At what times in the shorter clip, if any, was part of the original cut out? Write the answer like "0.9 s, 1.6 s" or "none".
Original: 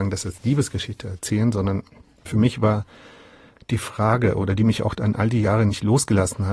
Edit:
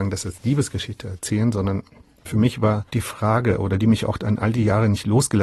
2.9 s